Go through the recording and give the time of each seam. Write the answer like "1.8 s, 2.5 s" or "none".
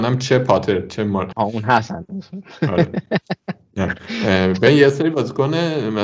1.3 s